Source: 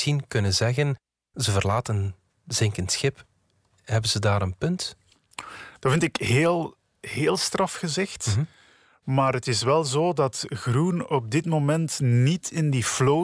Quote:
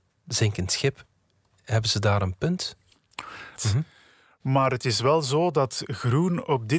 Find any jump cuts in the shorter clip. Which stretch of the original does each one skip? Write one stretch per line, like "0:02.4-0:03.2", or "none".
0:05.8-0:08.2

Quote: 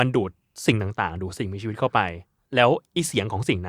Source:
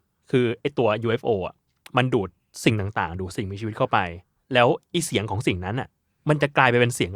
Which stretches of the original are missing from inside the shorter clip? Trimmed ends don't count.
none

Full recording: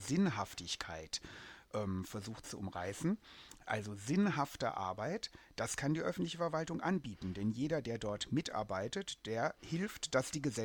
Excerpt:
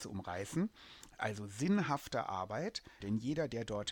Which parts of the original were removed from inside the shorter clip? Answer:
0:05.5-0:07.3

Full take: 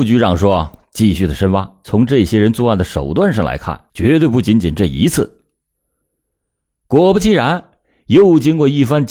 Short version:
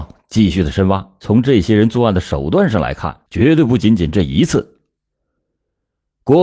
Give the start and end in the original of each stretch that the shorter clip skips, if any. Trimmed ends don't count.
none

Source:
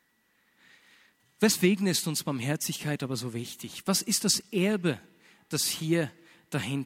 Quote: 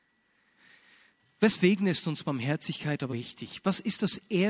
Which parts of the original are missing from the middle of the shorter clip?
0:03.1-0:03.3

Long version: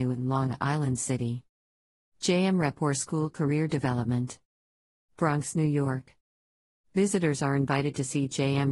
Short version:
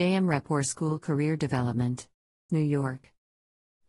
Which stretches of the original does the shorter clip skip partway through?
0:04.8-0:05.5

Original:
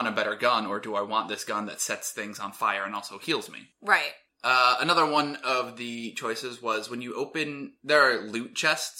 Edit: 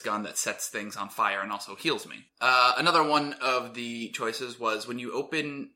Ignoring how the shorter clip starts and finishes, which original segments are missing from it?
0:03.7-0:04.3

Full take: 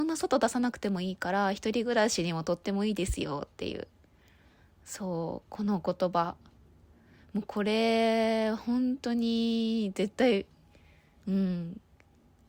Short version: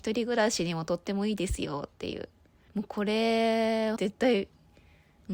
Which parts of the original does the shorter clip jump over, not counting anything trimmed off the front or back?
0:04.3-0:07.3
0:08.5-0:09.9

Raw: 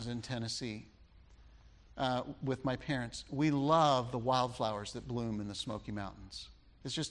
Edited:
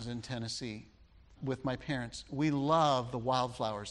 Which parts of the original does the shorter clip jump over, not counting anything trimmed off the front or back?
0:01.4-0:02.4

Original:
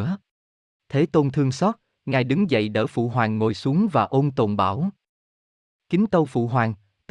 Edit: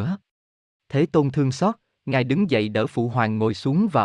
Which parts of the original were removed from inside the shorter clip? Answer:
none

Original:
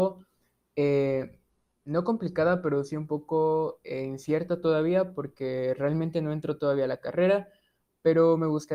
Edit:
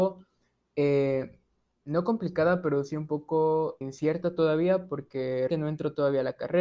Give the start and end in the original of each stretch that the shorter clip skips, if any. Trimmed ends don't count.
0:03.8-0:04.1
0:05.8-0:06.1

